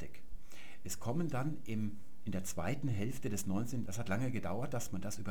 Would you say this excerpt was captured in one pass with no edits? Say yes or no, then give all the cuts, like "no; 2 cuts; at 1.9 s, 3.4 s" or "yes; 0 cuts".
no; 1 cut; at 3.9 s